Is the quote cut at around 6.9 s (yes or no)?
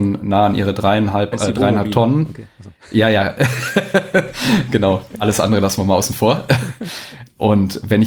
no